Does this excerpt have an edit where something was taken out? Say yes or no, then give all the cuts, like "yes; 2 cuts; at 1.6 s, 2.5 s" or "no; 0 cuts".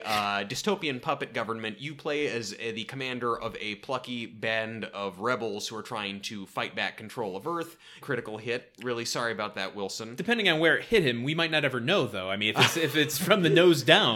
yes; 1 cut; at 8.0 s